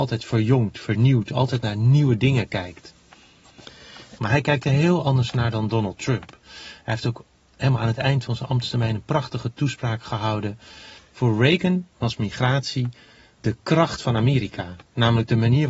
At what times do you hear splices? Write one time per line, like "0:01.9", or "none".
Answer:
0:04.2
0:11.0